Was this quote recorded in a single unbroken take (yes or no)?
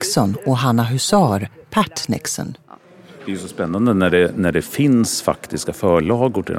yes